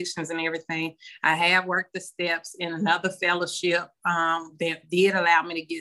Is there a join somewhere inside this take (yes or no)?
no